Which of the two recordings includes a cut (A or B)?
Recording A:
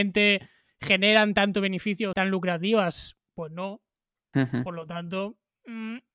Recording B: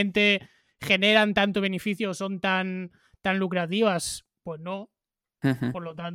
A